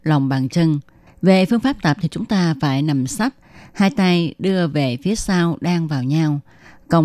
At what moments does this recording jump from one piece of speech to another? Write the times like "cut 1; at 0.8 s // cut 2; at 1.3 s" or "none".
cut 1; at 1.1 s